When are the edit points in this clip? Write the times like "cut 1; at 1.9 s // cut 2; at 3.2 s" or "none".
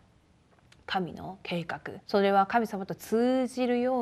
cut 1; at 2.0 s

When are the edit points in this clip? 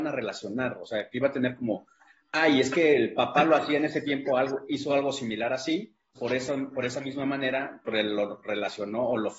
cut 1; at 6.1 s // cut 2; at 7.9 s

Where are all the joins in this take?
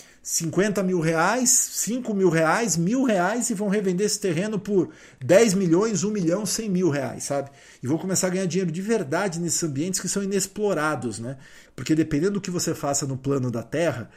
cut 1; at 11.7 s

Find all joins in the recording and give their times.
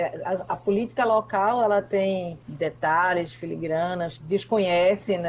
cut 1; at 2.4 s // cut 2; at 4.2 s

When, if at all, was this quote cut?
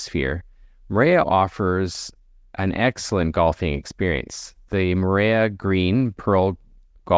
cut 1; at 1.2 s

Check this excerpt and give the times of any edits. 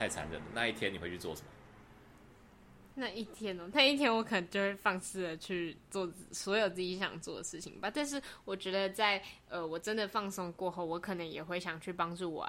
none

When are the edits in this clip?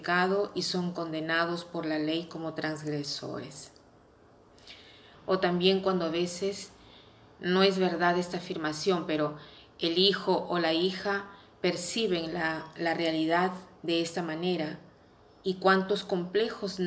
cut 1; at 5.1 s

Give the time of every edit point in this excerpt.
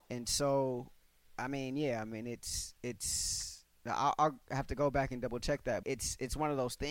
cut 1; at 5.8 s

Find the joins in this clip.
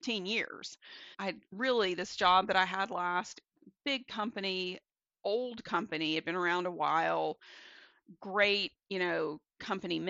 cut 1; at 1.1 s

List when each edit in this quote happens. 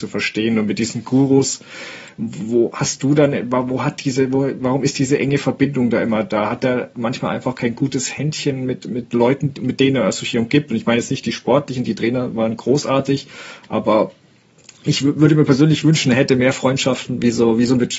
none

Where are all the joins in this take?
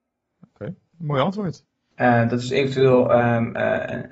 cut 1; at 1.9 s

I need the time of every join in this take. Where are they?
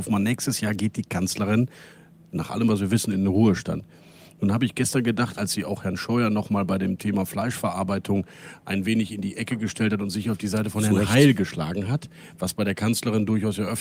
none

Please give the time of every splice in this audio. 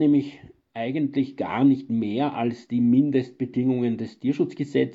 none

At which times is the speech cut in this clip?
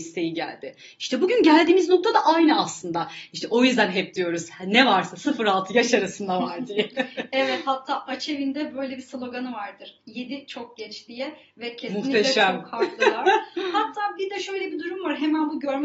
none

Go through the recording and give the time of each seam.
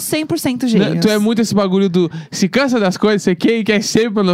none

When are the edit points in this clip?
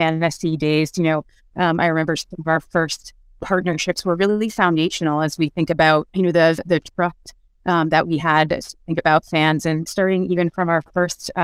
cut 1; at 6.1 s // cut 2; at 9.9 s

